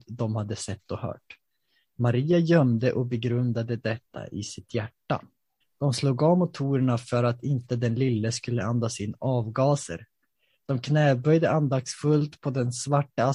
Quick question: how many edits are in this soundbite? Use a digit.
1